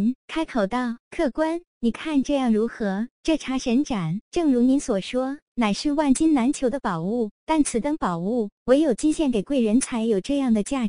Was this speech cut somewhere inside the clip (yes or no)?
no